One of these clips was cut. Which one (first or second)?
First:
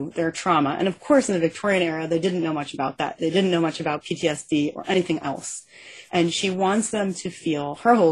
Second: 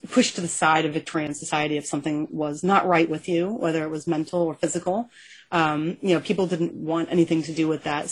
first